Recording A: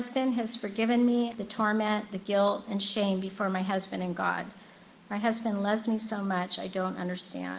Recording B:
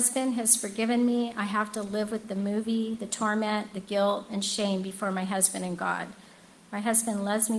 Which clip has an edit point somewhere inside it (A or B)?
A